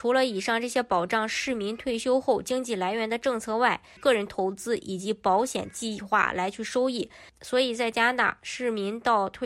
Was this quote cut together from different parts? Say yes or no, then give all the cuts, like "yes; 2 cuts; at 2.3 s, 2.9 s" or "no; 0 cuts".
yes; 2 cuts; at 4.0 s, 7.3 s